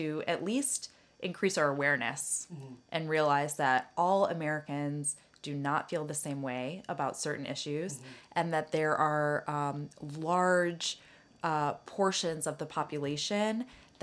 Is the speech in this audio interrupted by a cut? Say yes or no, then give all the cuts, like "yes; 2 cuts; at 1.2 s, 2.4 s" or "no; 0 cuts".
no; 0 cuts